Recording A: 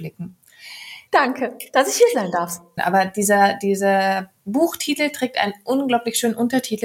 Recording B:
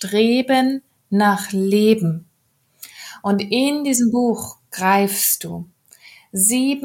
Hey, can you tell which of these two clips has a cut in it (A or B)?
A